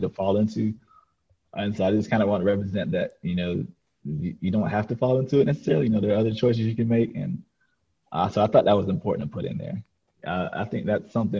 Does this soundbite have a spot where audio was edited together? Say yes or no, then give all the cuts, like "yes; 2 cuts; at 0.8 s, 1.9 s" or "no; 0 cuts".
yes; 1 cut; at 10.1 s